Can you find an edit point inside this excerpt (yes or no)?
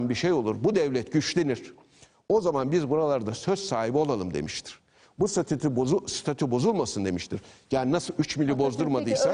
no